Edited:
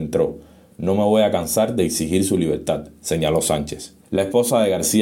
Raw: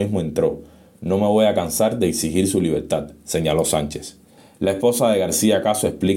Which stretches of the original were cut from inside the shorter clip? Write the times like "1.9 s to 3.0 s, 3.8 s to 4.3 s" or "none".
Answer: 4.3 s to 4.5 s